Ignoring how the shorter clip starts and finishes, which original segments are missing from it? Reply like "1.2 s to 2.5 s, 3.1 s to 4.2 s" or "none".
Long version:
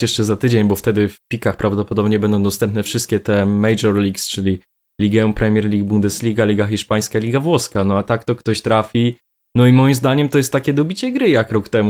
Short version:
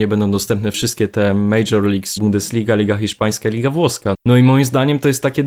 4.3 s to 5.9 s, 7.8 s to 9.4 s